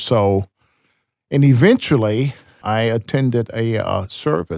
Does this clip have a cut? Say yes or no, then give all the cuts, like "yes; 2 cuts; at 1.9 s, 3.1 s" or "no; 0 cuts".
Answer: yes; 1 cut; at 2.6 s